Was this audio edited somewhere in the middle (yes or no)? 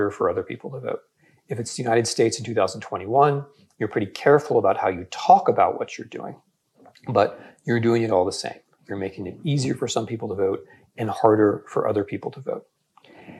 yes